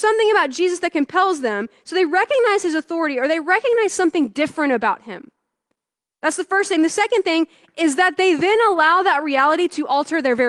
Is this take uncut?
yes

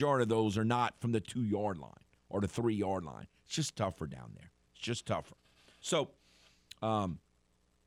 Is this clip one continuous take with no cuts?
yes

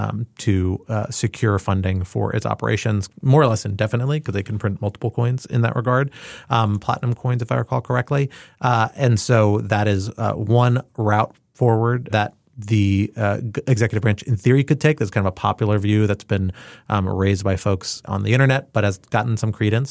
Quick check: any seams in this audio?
yes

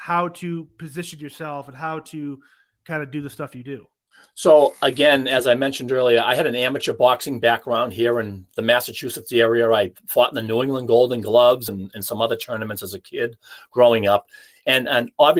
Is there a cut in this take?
no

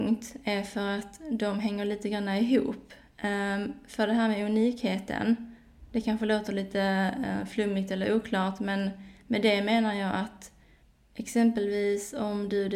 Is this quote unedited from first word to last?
yes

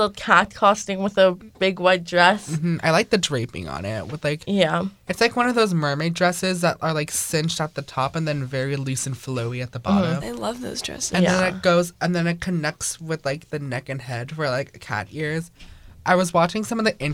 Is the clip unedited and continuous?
no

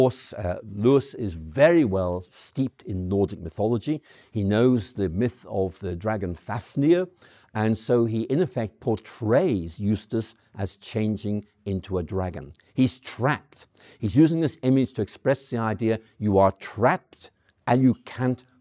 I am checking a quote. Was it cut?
no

